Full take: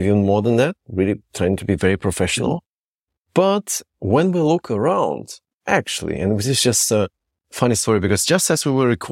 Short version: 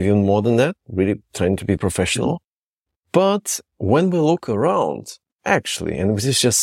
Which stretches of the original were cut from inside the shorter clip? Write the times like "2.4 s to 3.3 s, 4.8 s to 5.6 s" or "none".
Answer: 1.8 s to 2.0 s